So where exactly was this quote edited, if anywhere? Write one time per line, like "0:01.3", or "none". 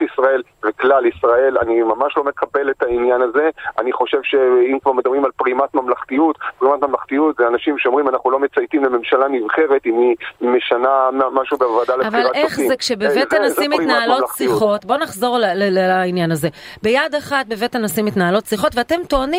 none